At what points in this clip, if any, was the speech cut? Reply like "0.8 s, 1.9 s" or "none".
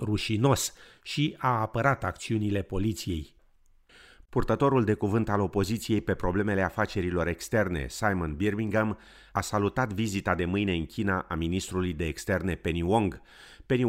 none

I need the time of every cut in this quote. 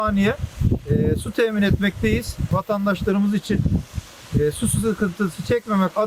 none

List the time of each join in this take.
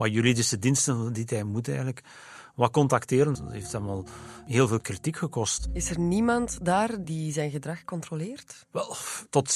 3.4 s, 7.0 s

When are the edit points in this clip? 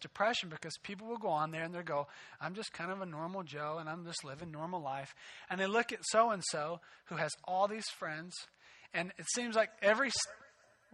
none

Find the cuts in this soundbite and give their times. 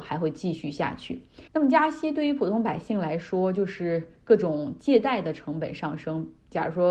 1.5 s

